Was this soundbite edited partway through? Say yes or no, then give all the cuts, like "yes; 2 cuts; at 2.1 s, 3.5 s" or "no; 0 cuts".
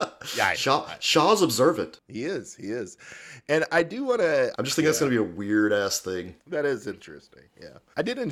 yes; 1 cut; at 4.5 s